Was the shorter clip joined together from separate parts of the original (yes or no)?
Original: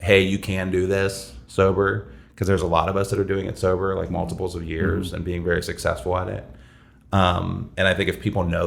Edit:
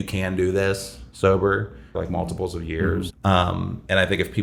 yes